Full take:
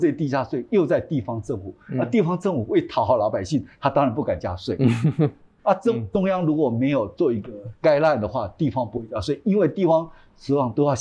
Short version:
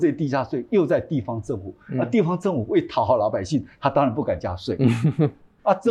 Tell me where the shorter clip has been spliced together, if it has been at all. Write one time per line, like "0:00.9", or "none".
none